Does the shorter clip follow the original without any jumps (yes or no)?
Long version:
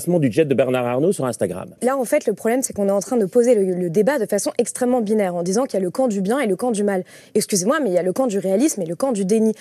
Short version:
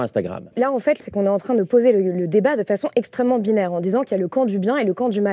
no